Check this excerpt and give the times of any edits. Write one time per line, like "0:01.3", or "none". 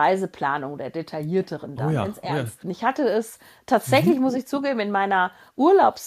0:02.6